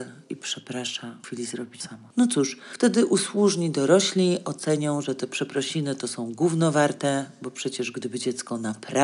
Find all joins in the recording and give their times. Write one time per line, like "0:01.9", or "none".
none

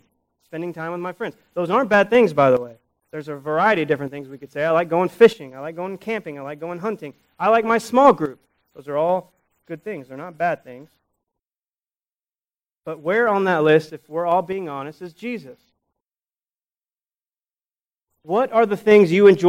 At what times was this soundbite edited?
0:03.0

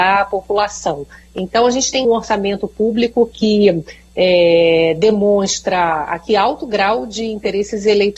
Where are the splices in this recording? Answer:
0:02.0

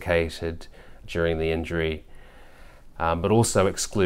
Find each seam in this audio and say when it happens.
0:01.0
0:02.9

